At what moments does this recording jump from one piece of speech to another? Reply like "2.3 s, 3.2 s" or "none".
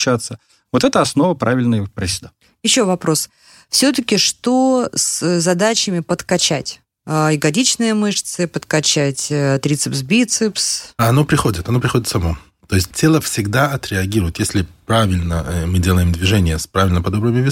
12.9 s